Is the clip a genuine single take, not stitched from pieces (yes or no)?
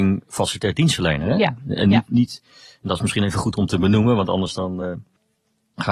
yes